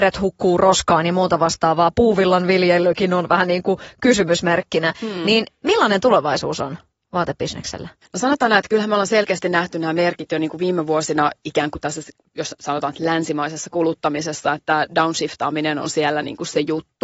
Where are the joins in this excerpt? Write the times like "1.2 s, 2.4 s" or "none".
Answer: none